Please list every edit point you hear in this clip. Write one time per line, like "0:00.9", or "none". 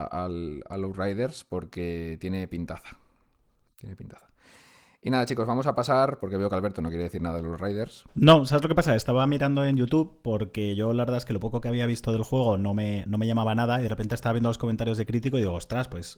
none